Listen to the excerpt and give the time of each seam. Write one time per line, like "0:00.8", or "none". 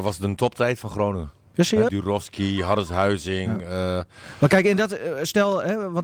0:01.9